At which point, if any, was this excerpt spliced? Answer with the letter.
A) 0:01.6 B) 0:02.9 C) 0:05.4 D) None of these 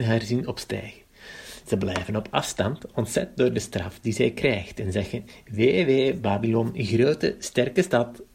D